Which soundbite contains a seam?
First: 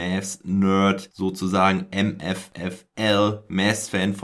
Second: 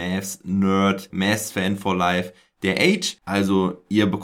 second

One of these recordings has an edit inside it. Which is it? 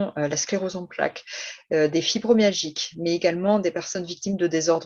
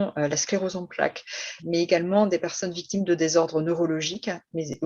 second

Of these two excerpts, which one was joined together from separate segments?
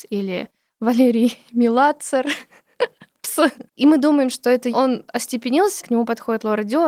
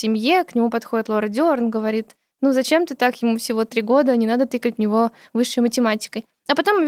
first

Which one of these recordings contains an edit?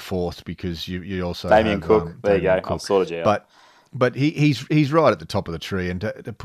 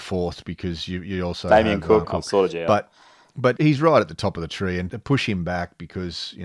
second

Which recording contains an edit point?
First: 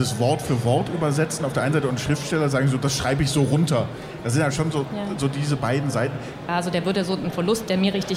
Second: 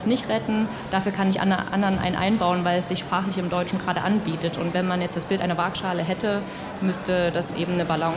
first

